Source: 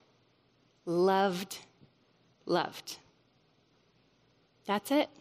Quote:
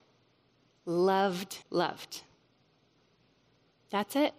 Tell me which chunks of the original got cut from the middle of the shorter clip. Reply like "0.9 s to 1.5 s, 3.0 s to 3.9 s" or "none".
1.6 s to 2.4 s

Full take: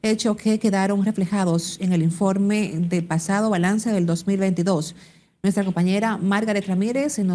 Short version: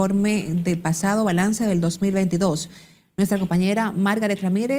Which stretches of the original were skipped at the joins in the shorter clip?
none

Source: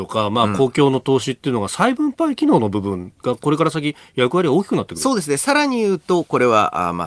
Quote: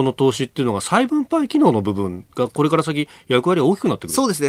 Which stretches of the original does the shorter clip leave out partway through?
none

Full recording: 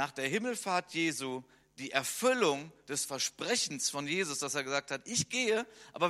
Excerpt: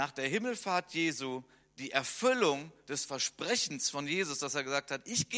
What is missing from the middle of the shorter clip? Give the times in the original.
none

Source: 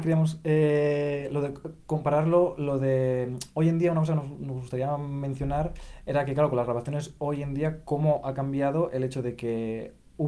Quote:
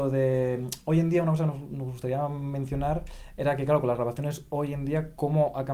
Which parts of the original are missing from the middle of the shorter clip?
none

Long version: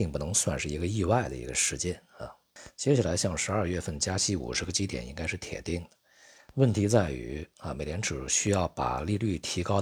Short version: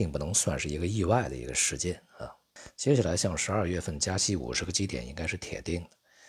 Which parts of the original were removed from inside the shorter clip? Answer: none

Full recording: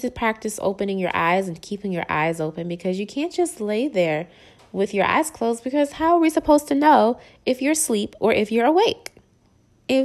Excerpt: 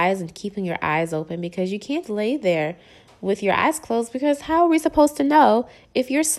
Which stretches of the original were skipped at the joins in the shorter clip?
3.3 s to 3.5 s

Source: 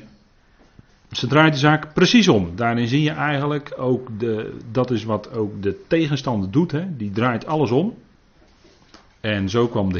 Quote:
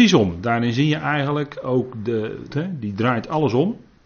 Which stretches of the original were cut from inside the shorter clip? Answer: 4.6 s to 6.7 s

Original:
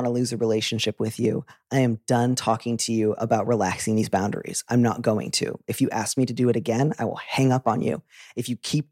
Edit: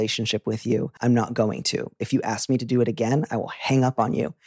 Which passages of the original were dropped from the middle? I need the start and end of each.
1.5 s to 4.6 s

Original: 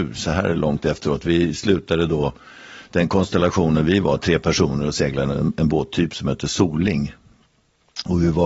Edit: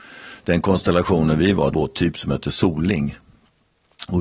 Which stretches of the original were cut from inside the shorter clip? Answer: 4.2 s to 5.7 s

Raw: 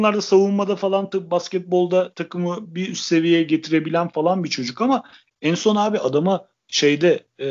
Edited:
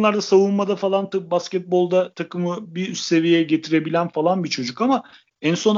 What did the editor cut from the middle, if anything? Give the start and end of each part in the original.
none

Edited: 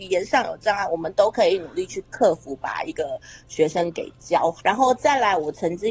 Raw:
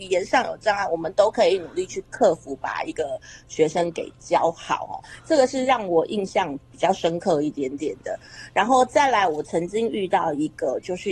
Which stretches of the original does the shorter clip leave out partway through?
4.6 s to 8.5 s

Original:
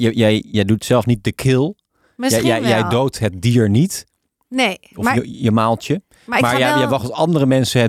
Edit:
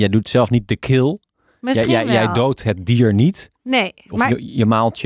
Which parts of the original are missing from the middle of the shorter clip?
4.1 s to 4.4 s

